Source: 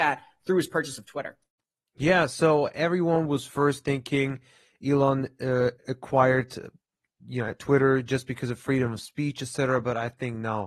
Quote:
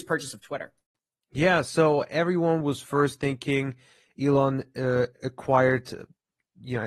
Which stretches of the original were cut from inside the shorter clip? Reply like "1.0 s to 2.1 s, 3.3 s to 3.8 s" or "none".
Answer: none